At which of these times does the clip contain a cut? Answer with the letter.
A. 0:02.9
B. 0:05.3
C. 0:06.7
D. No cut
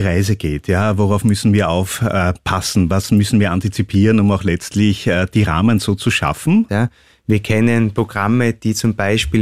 C